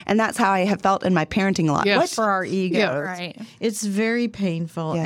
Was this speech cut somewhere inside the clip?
yes; 1 cut; at 2.2 s

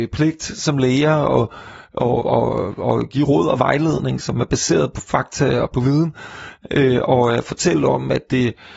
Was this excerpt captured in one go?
no; 1 cut; at 2.2 s

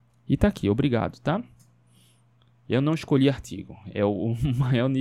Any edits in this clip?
no; 0 cuts

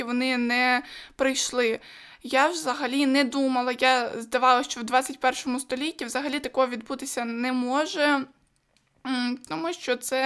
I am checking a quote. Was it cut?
no; 0 cuts

